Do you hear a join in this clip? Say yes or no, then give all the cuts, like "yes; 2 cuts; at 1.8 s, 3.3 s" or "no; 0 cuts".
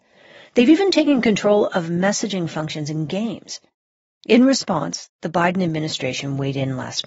no; 0 cuts